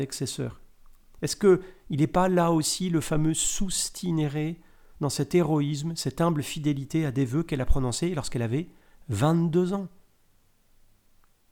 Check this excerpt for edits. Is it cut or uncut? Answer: uncut